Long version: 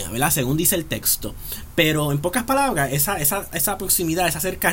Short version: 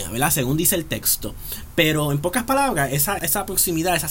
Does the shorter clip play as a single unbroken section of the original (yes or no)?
no